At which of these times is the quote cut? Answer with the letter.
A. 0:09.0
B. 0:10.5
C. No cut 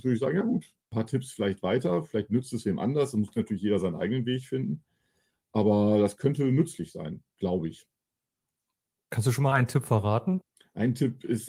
C